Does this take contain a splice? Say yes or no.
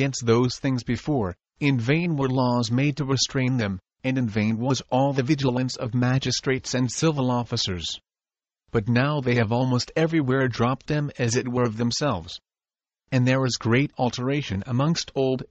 no